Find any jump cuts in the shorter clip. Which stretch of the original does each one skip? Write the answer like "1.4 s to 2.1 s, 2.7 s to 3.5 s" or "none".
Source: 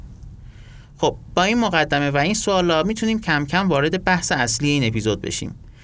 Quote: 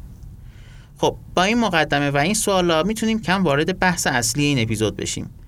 3.2 s to 3.5 s